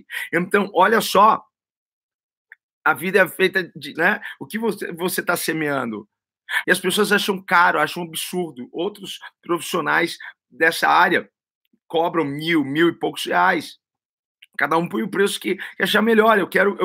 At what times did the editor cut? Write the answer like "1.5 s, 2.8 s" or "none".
4.0 s, 6.6 s